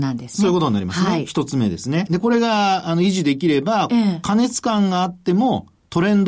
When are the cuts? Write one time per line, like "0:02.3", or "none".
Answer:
0:02.1
0:03.9